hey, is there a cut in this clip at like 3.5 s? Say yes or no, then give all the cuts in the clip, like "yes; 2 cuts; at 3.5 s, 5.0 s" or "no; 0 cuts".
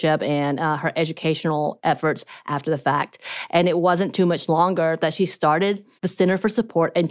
no; 1 cut; at 6.0 s